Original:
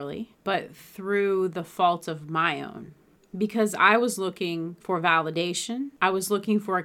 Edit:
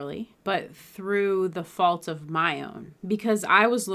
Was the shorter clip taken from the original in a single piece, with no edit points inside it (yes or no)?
no